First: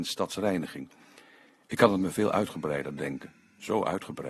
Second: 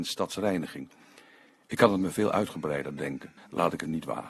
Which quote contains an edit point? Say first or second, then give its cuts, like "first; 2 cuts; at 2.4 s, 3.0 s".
second; 1 cut; at 3.4 s